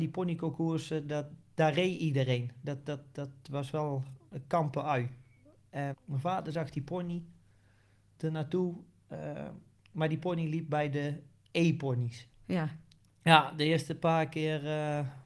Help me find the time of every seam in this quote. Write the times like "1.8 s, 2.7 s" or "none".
5.9 s, 13.0 s